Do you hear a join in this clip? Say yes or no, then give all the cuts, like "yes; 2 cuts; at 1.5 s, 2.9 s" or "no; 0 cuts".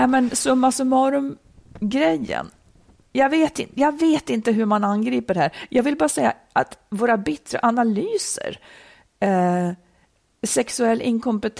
no; 0 cuts